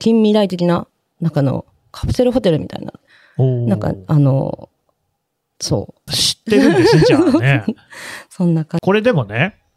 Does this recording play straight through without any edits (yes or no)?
no